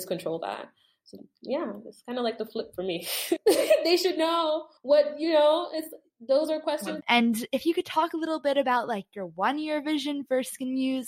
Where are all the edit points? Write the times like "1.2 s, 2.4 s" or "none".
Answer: 3.4 s, 4.8 s, 7.0 s